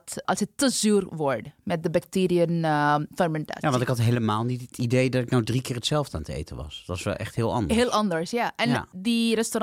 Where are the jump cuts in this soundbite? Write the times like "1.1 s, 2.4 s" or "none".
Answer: none